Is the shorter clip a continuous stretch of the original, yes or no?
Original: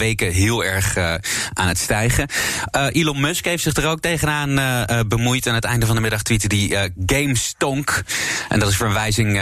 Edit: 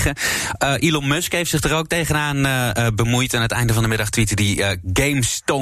yes